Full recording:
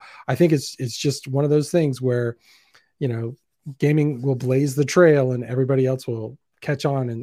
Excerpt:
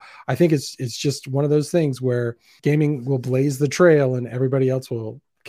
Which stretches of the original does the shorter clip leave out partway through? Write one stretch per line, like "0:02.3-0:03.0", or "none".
0:02.6-0:03.8